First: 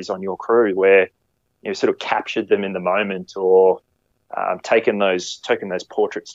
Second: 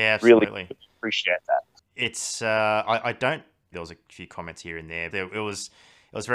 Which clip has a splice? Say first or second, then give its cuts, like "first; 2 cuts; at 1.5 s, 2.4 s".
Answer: second; 2 cuts; at 3.7 s, 5.1 s